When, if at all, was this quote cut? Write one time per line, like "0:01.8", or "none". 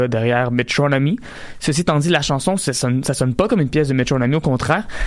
none